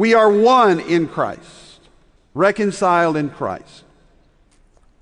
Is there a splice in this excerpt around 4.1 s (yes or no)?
no